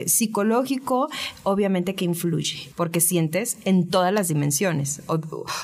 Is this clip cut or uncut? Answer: cut